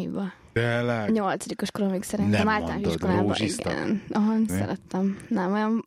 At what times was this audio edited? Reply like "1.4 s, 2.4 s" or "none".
4.5 s